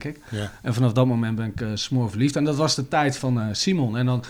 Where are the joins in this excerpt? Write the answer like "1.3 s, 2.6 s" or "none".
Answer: 3.2 s